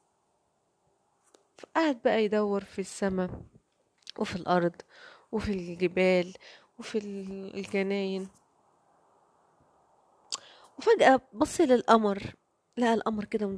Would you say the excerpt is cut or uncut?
uncut